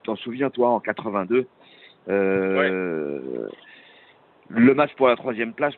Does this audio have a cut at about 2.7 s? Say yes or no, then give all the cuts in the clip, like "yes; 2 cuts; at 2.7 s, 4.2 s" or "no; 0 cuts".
no; 0 cuts